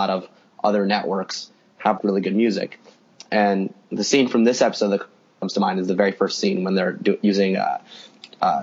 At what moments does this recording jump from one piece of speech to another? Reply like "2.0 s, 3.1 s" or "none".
2.0 s